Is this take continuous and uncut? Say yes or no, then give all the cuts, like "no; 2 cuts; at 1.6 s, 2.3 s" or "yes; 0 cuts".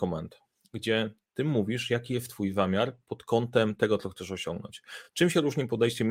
yes; 0 cuts